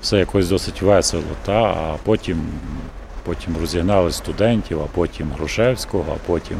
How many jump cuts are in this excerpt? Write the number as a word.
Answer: zero